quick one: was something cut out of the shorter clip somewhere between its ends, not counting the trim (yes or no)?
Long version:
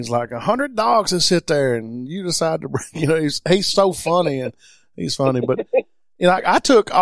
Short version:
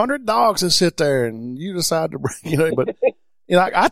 yes